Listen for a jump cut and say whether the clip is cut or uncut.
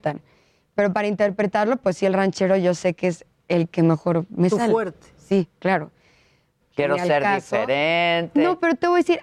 cut